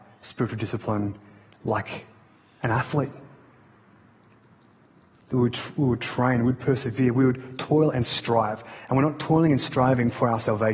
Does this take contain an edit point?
no; 0 cuts

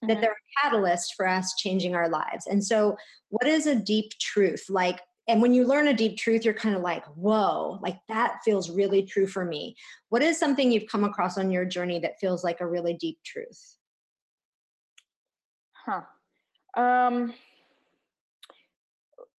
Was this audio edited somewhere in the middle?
no; 0 cuts

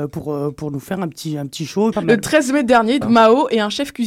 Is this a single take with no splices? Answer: no; 2 cuts; at 1.9 s, 3.0 s

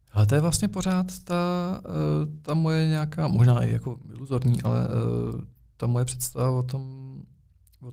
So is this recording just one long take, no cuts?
yes; 0 cuts

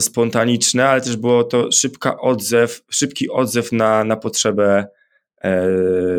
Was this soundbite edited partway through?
no; 0 cuts

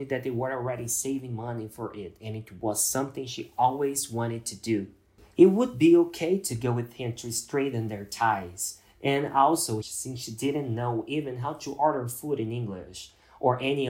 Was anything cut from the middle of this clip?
yes; 1 cut; at 9.8 s

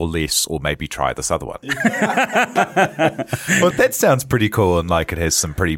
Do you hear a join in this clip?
yes; 2 cuts; at 1.6 s, 3.7 s

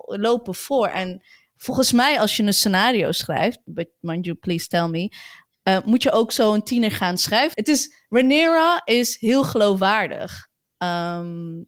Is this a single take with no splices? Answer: no; 1 cut; at 7.5 s

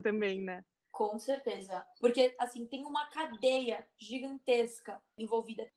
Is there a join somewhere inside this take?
yes; 1 cut; at 1.9 s

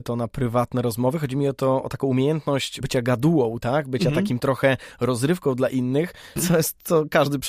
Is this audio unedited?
no; 2 cuts; at 2.8 s, 6.4 s

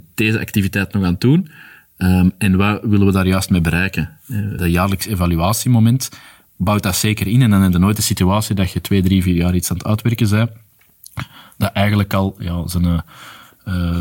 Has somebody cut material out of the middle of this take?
yes; 1 cut; at 4.6 s

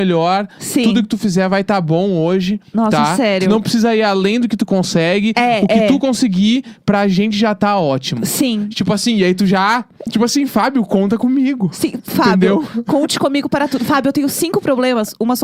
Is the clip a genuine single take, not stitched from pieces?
no; 1 cut; at 10.1 s

